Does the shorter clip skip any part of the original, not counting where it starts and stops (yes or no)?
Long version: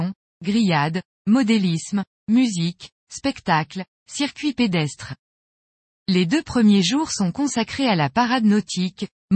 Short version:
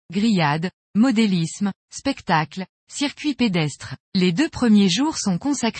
yes